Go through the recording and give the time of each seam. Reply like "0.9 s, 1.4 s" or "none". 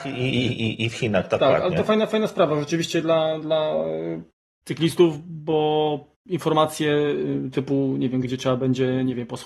6.1 s, 8.2 s